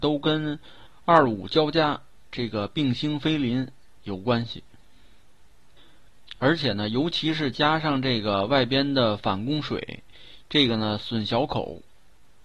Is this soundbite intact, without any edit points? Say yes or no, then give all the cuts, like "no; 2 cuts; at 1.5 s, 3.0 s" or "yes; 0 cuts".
yes; 0 cuts